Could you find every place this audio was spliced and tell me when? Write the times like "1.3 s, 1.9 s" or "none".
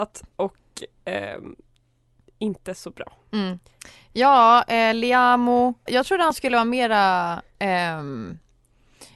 5.9 s